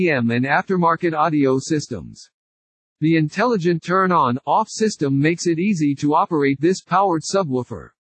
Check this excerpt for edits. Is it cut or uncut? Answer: uncut